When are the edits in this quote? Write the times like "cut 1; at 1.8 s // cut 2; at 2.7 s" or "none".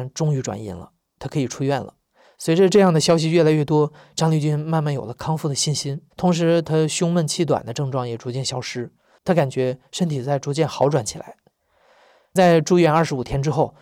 cut 1; at 2.2 s // cut 2; at 6.1 s